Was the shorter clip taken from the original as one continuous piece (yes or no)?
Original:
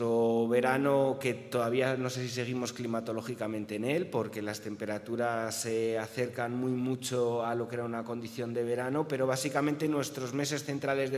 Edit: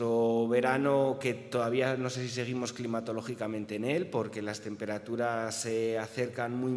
yes